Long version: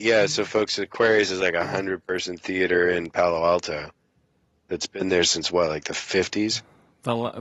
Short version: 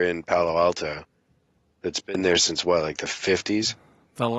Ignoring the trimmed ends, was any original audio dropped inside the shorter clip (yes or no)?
no